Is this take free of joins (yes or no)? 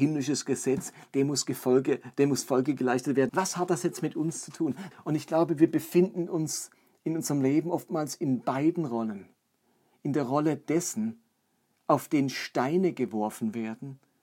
no